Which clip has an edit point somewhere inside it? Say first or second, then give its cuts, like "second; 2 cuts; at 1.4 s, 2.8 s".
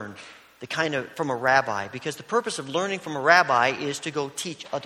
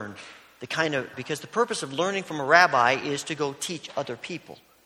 second; 1 cut; at 1.1 s